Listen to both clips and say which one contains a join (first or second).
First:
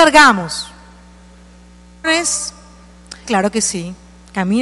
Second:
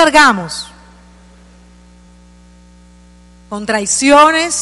first